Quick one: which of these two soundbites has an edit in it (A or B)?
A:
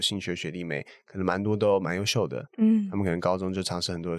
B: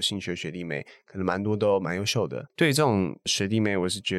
B